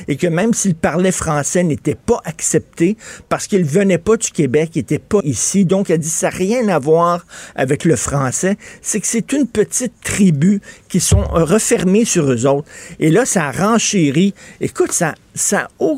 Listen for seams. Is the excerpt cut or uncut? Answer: cut